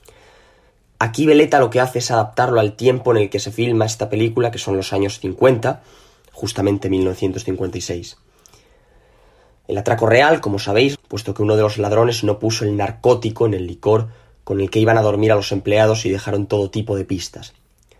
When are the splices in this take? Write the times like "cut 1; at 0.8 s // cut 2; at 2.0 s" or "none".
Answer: cut 1; at 10.9 s